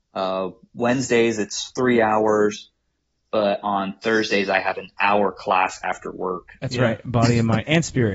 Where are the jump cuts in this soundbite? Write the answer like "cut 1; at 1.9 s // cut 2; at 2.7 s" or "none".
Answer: cut 1; at 6.6 s